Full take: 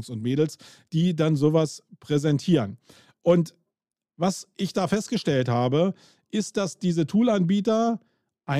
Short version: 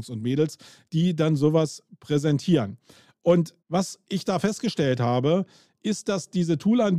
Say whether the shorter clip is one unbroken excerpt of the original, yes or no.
no